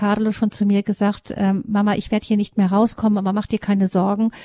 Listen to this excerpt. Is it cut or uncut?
uncut